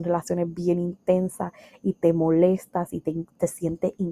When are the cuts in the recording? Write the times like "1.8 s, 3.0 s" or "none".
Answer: none